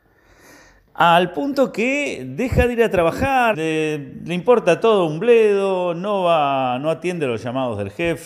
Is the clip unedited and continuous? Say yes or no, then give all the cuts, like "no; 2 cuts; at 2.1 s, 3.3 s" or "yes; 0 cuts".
no; 1 cut; at 3.5 s